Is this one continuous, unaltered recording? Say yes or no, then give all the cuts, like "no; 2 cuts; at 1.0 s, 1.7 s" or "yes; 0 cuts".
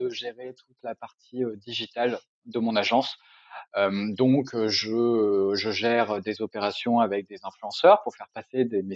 yes; 0 cuts